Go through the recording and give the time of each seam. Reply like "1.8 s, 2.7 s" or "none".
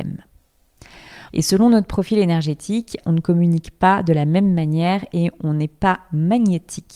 1.3 s, 3.0 s